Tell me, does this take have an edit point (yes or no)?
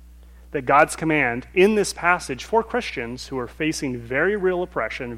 no